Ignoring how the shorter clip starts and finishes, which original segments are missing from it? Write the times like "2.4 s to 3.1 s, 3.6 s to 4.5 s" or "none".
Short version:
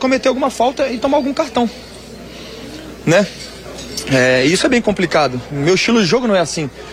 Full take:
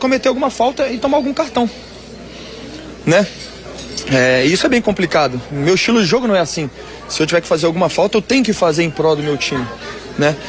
none

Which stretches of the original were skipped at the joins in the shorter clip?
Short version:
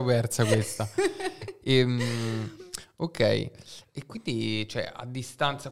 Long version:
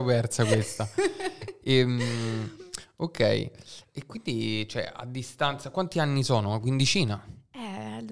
none

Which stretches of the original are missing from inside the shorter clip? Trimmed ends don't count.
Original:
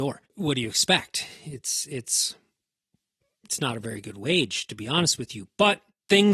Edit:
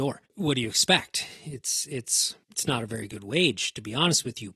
2.4 s to 3.4 s

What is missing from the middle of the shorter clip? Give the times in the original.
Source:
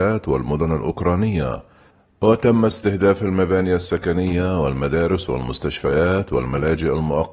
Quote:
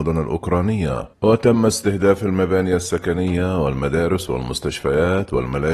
1.7 s to 2.1 s

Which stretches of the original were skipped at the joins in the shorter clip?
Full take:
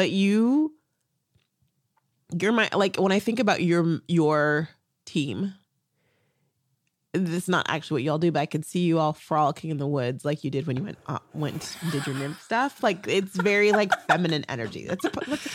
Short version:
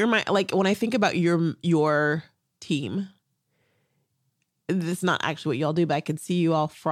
none

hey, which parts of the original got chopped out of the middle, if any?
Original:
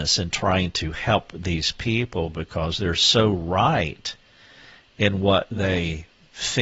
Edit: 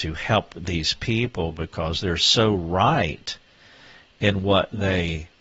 none

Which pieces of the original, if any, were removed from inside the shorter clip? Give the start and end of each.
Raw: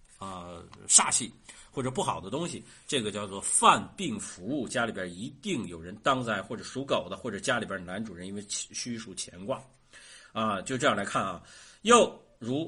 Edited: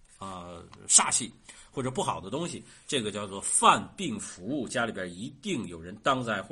none

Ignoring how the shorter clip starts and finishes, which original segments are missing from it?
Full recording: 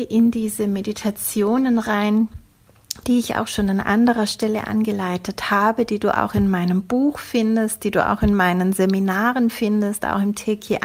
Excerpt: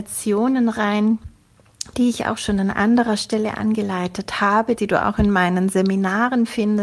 5.9 s to 7.8 s

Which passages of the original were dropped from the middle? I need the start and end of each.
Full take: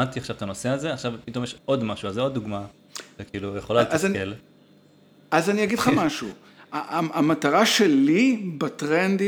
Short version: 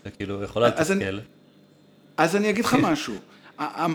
none

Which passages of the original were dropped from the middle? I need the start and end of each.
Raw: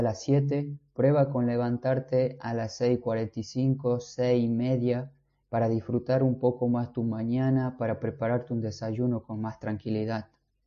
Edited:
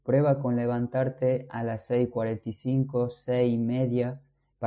none

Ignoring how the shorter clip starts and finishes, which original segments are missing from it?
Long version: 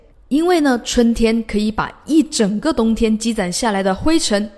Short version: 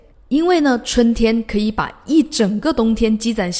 none

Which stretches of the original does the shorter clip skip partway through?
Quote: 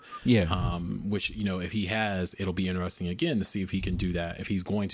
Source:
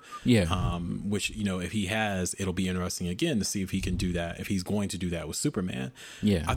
none

